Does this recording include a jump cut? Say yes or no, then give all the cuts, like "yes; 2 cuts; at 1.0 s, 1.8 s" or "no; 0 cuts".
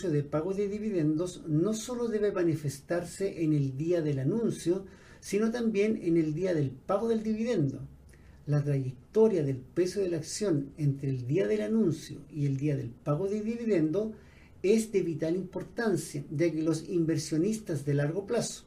no; 0 cuts